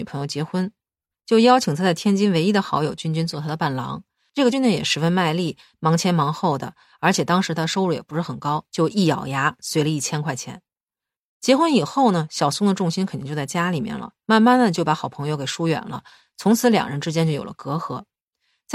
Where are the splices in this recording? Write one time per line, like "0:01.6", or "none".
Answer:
0:04.5
0:08.7